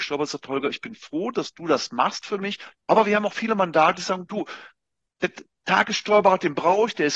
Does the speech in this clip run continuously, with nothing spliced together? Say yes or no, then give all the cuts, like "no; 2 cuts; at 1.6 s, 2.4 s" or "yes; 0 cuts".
no; 1 cut; at 2.7 s